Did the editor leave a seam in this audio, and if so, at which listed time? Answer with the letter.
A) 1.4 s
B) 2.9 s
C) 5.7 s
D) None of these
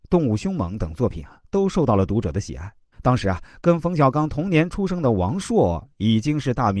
B